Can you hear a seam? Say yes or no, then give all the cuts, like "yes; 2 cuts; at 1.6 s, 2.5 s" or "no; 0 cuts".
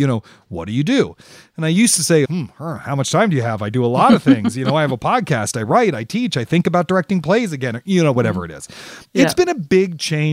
yes; 1 cut; at 2.2 s